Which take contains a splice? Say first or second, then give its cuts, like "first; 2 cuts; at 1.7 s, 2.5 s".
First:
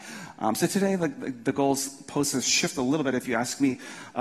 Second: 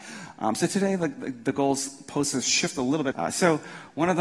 second; 1 cut; at 3.1 s